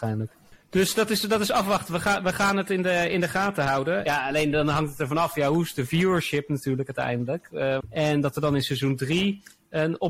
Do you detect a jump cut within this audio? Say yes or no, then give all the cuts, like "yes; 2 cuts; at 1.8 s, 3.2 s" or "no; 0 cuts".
yes; 2 cuts; at 4.1 s, 7.8 s